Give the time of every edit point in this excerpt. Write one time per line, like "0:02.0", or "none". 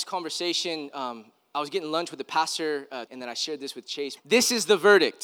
0:03.1
0:04.2